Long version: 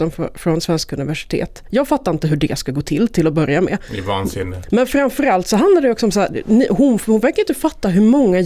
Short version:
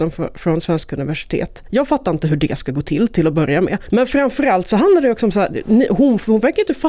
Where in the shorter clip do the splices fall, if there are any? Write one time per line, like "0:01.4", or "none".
0:03.9